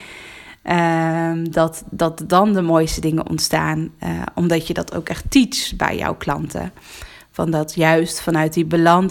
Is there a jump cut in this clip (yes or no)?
no